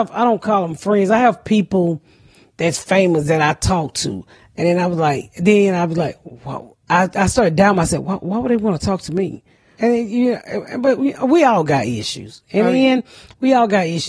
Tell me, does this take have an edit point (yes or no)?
yes